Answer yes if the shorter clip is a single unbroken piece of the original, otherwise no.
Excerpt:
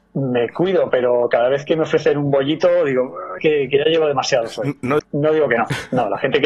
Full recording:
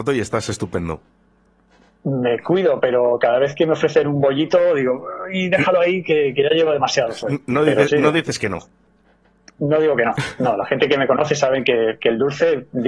no